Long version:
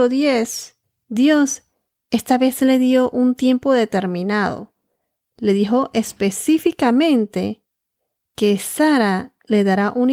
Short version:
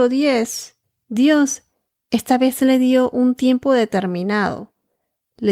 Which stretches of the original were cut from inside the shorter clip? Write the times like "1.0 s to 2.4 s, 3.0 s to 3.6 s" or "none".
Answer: none